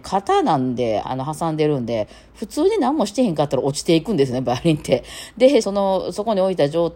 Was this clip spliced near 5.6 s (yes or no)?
yes